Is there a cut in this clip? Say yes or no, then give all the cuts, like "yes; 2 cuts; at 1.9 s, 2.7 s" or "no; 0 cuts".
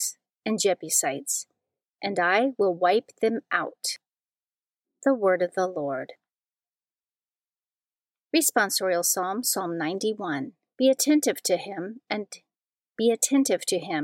yes; 1 cut; at 10.7 s